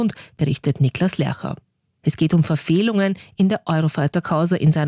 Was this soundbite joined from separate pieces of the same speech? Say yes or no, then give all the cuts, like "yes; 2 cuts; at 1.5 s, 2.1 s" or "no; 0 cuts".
yes; 1 cut; at 2.0 s